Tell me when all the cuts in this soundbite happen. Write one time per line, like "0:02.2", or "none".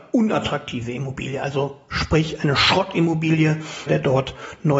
0:03.9